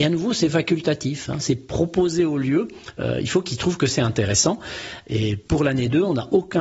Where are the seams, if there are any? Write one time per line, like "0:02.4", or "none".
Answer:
none